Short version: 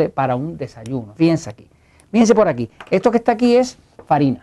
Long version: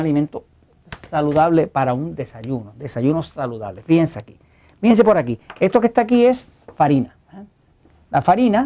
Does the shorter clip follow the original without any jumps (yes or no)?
no